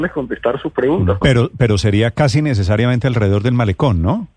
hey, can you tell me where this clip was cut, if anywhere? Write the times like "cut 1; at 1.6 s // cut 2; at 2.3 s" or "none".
cut 1; at 1.2 s